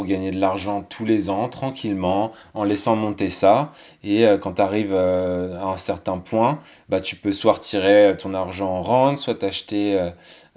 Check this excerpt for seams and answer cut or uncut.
uncut